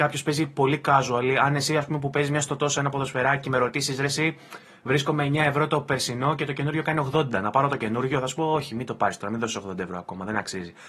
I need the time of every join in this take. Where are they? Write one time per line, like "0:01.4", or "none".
none